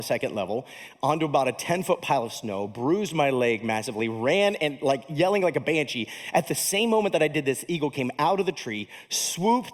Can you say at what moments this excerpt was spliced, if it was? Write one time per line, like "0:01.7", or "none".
none